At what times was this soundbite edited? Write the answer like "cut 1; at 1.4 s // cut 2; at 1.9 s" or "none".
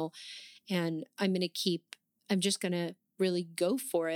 cut 1; at 2.2 s